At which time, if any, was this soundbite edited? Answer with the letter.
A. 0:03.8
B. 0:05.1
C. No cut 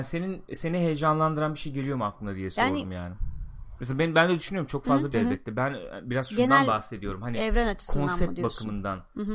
B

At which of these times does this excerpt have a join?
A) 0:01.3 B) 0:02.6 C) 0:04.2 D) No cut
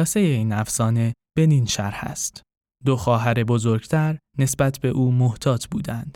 B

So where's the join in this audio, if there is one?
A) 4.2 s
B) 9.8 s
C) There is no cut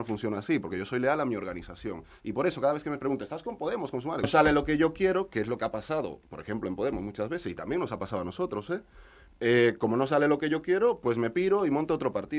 A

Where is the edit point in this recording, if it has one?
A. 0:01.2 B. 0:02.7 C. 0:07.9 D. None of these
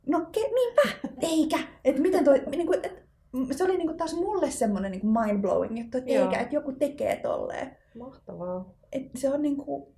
A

